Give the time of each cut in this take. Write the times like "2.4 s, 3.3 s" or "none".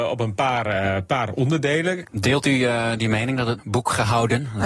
2.0 s, 3.6 s